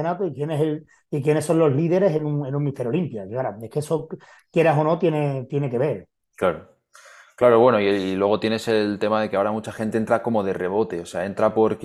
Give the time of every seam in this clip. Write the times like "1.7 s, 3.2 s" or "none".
none